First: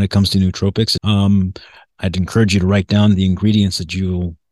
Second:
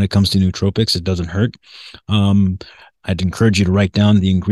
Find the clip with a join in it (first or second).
first